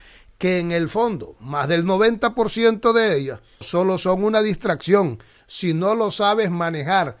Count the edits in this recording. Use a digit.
1